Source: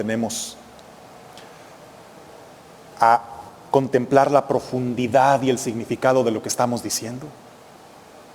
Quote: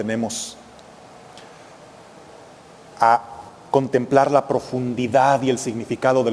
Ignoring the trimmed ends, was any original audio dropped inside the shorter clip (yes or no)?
no